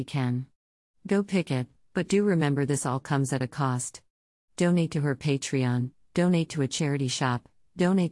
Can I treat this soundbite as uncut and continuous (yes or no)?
yes